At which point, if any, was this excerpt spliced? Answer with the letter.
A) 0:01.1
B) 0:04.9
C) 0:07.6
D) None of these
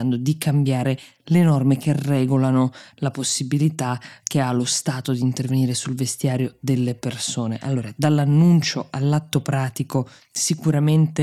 D